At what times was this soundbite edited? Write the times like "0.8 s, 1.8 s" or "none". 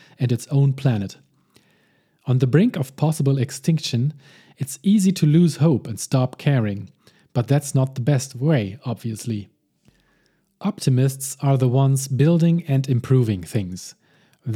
none